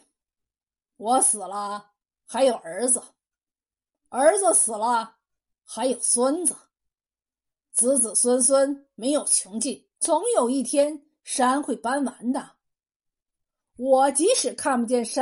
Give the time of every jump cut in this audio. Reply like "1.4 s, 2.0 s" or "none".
9.9 s